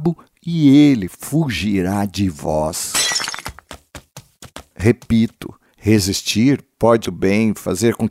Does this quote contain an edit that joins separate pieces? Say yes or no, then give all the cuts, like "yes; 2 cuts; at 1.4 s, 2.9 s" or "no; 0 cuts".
yes; 1 cut; at 7.0 s